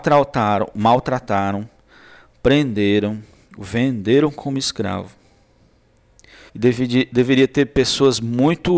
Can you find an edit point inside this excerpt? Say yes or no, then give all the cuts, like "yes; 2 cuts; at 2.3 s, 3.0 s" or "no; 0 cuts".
yes; 1 cut; at 6.5 s